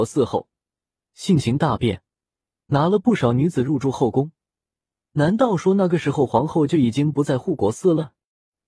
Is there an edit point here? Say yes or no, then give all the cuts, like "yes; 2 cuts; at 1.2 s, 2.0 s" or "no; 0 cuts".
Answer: no; 0 cuts